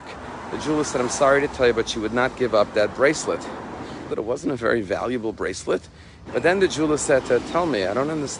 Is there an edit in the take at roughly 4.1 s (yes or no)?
yes